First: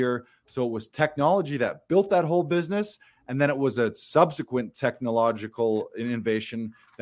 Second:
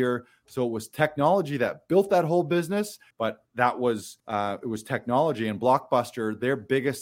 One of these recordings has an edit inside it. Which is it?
second; 2 cuts; at 3.1 s, 4.2 s

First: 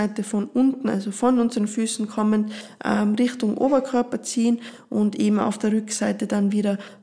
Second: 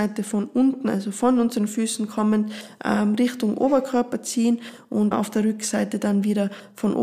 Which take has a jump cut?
second; 1 cut; at 5.1 s

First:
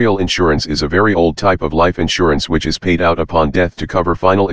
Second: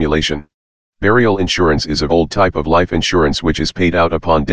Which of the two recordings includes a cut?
second; 2 cuts; at 0.9 s, 2.1 s

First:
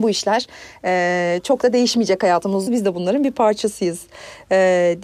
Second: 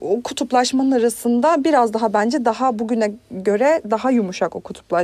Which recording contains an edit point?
first; 1 cut; at 2.7 s

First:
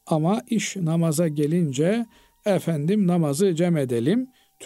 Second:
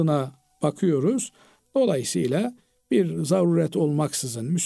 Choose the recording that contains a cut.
second; 1 cut; at 1.6 s

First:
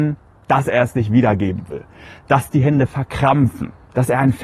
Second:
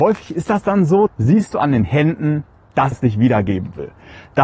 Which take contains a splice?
second; 2 cuts; at 1.1 s, 2.9 s

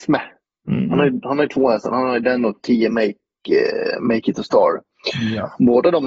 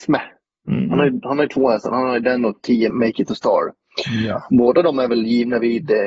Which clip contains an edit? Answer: second; 1 cut; at 2.9 s

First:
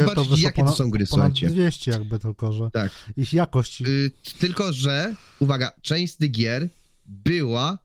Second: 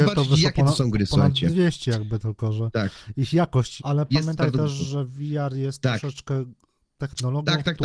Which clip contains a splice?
second; 1 cut; at 3.8 s

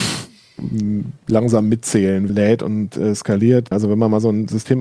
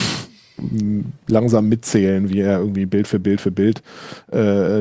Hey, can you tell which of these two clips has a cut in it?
first; 2 cuts; at 2.3 s, 3.7 s

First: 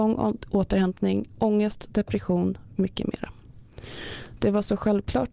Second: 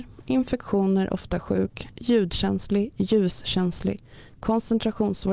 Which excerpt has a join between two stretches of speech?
first; 1 cut; at 2.8 s

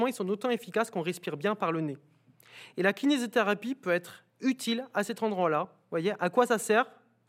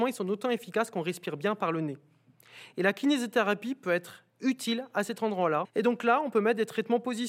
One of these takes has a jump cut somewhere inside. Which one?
second; 1 cut; at 5.6 s

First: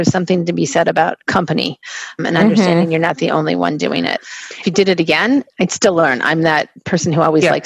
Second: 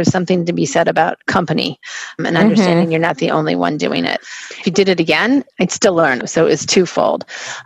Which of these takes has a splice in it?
second; 1 cut; at 6.2 s

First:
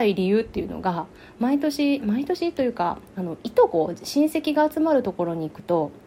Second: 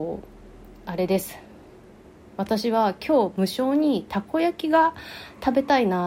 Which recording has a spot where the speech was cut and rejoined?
first; 1 cut; at 3.1 s

